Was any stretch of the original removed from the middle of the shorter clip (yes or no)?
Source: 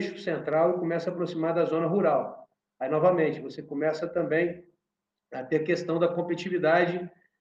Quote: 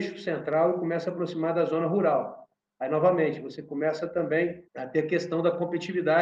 yes